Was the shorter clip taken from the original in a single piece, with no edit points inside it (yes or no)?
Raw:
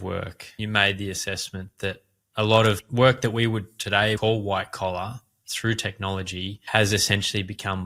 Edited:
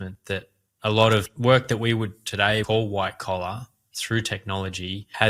yes